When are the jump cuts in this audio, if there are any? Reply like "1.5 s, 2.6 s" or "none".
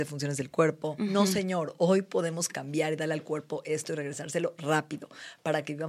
1.0 s

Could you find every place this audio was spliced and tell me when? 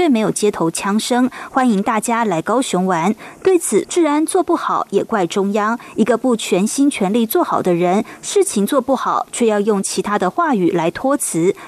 3.8 s

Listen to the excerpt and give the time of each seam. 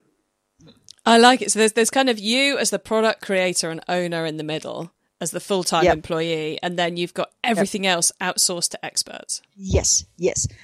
9.5 s

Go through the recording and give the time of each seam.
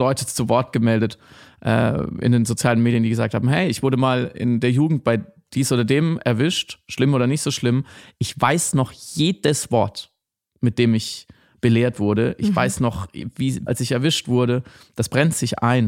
13.7 s

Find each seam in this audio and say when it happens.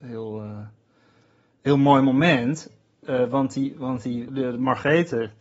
4.3 s

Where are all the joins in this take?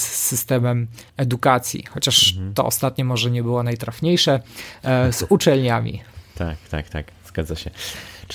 1.1 s

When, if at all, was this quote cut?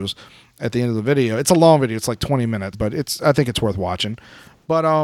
2.7 s

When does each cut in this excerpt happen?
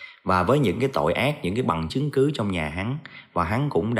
1.9 s

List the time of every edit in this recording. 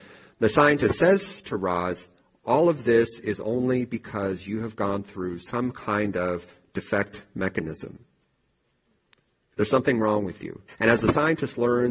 10.7 s

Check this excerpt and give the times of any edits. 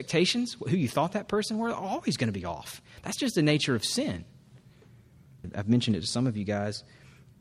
5.4 s

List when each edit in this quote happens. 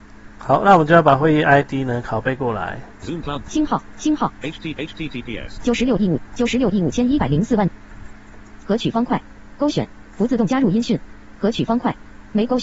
6.3 s, 8.6 s

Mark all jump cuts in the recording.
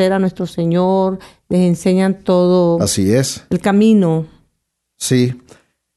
none

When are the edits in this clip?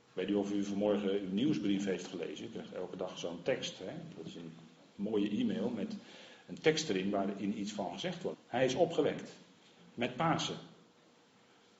8.3 s

